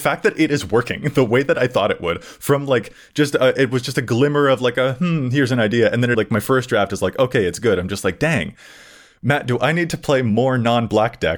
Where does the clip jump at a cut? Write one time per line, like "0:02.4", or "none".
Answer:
0:06.1